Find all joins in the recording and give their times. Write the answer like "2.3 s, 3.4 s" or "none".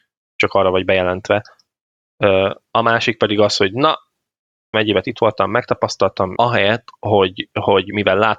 4.7 s, 6.4 s